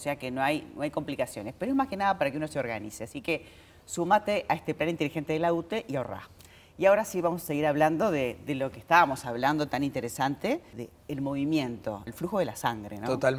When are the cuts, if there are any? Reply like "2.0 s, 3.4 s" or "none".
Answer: 10.7 s, 12.1 s